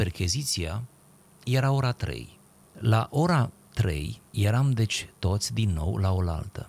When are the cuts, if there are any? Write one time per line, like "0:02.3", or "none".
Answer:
0:02.6
0:04.3